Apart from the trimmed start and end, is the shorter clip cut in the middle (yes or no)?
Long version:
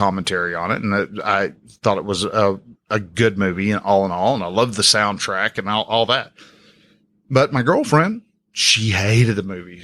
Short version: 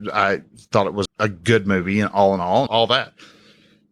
yes